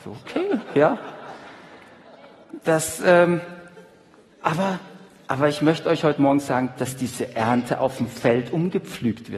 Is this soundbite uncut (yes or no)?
no